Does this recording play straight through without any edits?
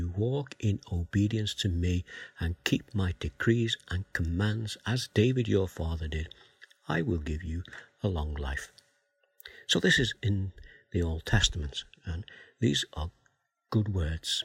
yes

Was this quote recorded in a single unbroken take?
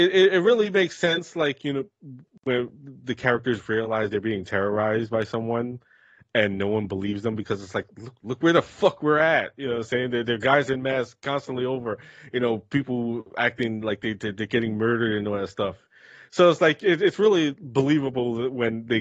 yes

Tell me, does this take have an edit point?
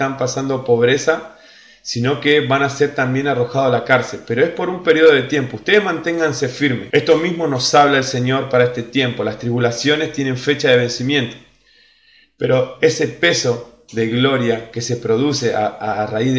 yes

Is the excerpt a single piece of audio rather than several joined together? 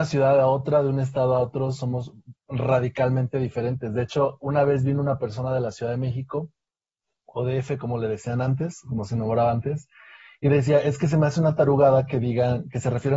yes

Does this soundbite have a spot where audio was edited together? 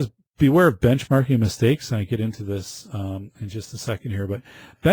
no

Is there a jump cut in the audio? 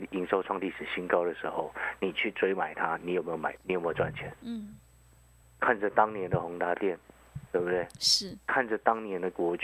no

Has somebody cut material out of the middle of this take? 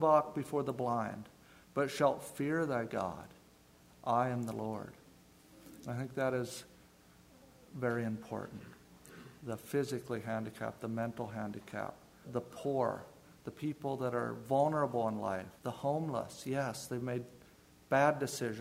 yes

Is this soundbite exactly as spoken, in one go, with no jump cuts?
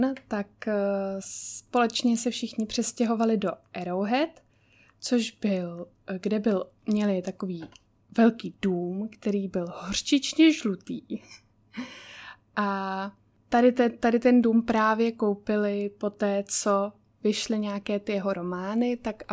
yes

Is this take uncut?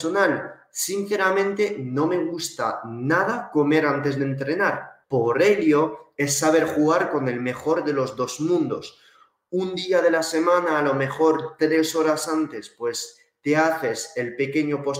no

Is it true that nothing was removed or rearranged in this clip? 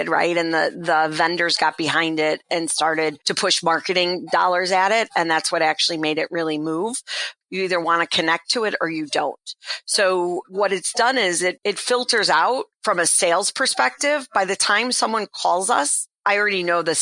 no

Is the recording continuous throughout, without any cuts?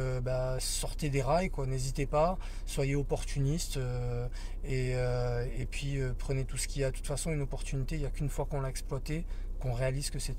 yes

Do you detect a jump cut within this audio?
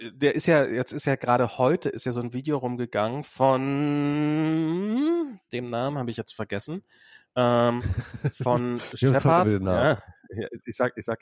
no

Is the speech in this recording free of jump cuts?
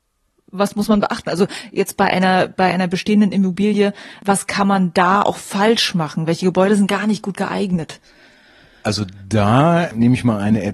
yes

